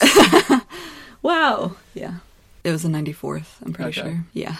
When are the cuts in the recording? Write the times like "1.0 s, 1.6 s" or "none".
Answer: 2.6 s